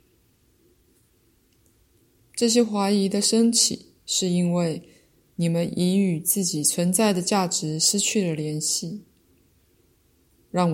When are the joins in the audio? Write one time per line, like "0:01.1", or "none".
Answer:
0:02.2